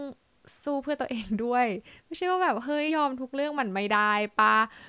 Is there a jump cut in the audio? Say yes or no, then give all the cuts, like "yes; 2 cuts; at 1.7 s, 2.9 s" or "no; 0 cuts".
yes; 1 cut; at 2.9 s